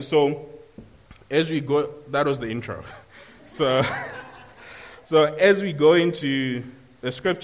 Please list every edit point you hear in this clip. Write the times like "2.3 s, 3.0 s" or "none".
none